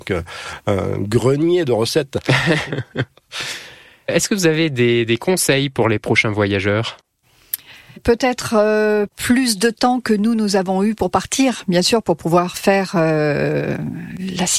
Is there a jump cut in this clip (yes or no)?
yes